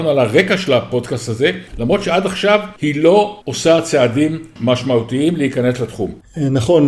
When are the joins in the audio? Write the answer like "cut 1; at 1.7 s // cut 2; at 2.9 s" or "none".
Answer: cut 1; at 1.7 s